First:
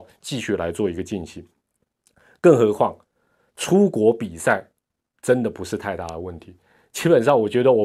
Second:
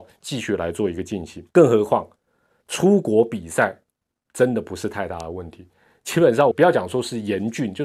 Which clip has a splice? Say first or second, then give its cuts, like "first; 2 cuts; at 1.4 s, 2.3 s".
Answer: second; 2 cuts; at 1.5 s, 6.5 s